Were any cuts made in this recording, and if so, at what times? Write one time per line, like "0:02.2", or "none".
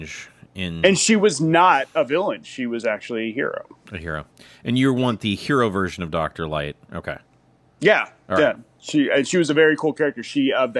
0:06.8